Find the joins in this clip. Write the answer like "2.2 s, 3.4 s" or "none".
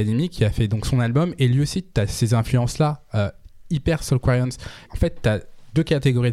4.9 s